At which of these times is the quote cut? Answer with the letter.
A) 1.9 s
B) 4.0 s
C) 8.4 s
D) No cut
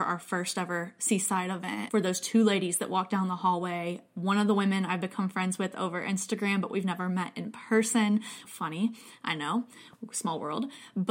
C